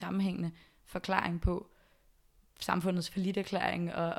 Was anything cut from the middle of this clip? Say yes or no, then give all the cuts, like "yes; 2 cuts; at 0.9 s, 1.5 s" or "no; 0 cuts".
no; 0 cuts